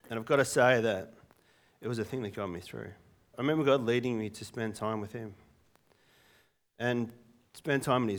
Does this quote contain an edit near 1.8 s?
no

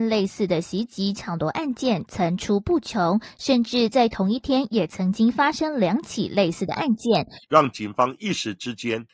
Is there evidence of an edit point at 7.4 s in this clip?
yes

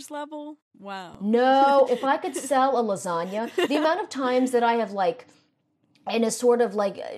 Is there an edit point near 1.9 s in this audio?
yes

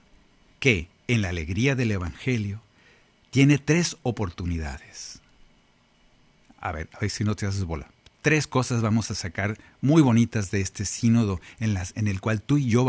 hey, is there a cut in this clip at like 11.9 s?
yes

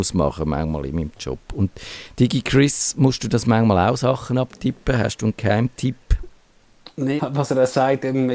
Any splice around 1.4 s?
no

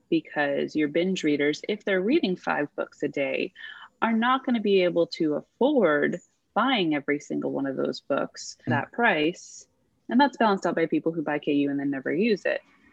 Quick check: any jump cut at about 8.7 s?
yes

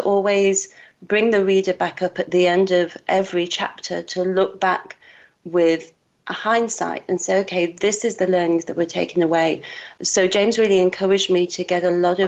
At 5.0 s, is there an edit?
no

